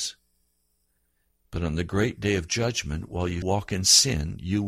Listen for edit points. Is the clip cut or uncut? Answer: cut